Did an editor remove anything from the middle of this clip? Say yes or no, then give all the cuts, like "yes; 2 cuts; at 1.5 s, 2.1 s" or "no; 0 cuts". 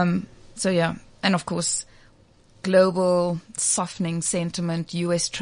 no; 0 cuts